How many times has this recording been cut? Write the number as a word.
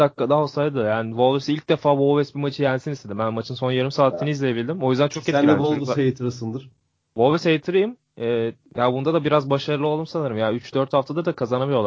zero